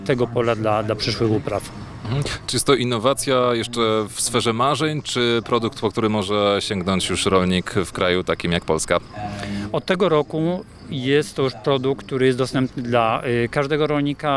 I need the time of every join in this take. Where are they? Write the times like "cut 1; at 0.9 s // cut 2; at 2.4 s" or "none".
none